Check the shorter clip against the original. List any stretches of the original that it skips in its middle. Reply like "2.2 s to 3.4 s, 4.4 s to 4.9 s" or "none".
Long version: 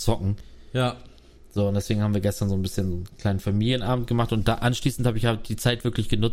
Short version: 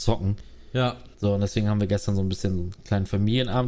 1.1 s to 1.5 s